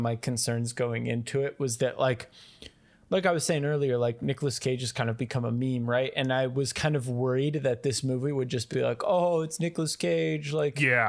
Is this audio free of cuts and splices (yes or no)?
yes